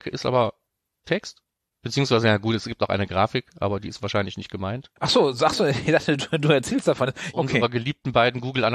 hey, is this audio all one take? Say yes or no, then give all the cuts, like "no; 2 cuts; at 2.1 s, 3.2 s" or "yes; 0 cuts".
no; 2 cuts; at 5.0 s, 7.3 s